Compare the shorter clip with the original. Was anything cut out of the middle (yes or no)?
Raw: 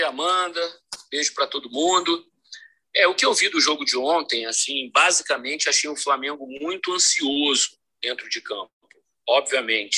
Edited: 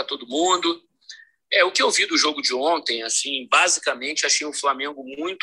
no